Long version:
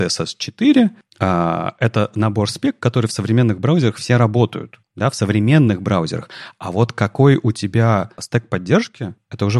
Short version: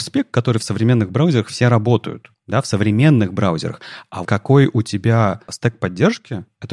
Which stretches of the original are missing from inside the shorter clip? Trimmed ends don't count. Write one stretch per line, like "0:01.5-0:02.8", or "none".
0:06.7-0:06.9